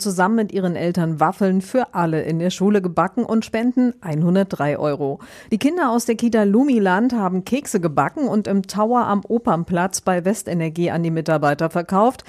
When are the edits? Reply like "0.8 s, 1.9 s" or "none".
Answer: none